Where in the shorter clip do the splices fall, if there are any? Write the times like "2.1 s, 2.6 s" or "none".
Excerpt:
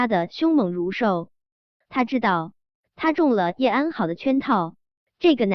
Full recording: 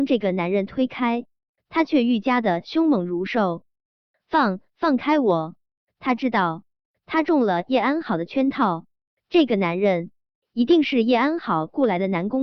1.8 s